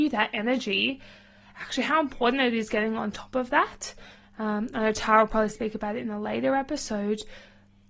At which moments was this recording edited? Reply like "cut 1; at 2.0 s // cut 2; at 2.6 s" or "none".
none